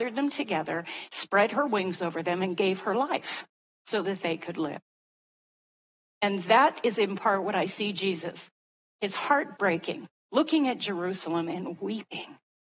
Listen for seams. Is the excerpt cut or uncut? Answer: uncut